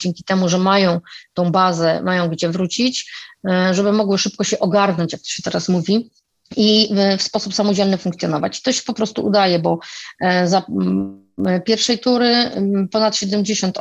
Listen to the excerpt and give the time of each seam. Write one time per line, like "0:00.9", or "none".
none